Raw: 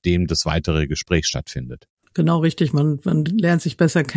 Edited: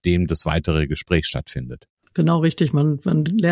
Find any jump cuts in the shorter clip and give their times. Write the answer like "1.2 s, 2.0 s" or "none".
none